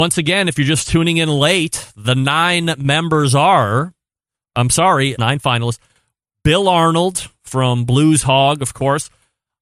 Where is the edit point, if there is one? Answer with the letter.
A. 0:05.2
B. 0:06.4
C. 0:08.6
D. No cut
A